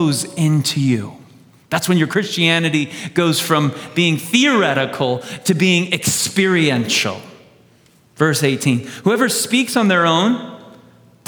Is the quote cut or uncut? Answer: uncut